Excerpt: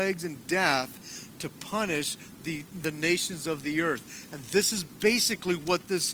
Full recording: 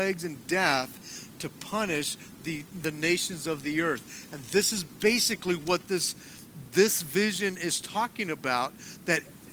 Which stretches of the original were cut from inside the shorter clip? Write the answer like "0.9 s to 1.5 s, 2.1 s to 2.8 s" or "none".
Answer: none